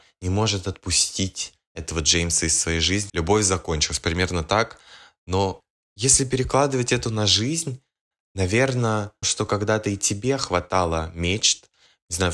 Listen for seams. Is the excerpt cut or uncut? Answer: cut